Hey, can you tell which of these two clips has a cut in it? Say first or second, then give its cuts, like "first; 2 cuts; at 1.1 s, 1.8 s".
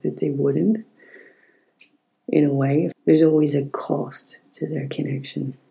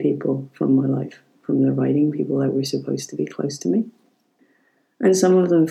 first; 1 cut; at 2.9 s